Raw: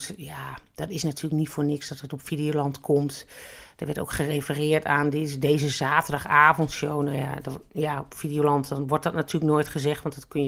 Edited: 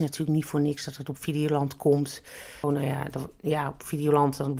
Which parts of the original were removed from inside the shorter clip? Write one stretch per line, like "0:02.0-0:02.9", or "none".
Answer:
0:03.7-0:06.9